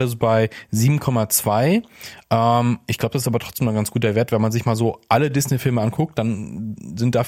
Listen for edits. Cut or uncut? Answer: uncut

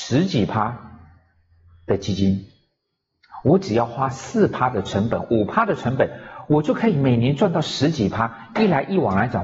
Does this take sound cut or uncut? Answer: uncut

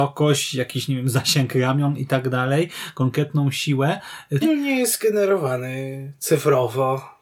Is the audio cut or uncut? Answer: cut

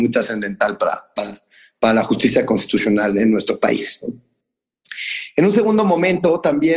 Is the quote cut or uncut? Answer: uncut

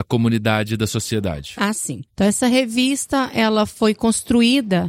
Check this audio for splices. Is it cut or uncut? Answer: cut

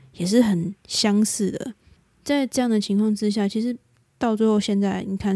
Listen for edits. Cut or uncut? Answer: uncut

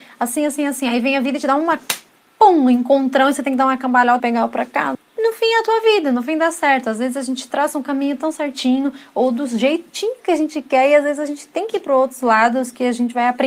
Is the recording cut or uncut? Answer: cut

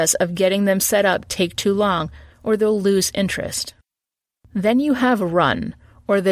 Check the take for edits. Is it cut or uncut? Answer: uncut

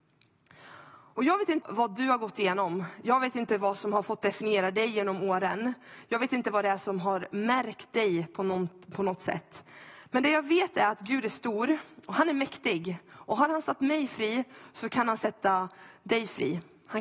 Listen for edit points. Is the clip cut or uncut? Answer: cut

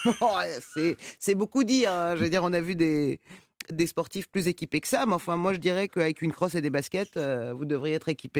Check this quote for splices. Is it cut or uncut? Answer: uncut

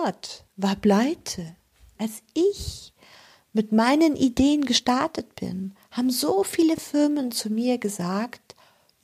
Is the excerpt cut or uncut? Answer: cut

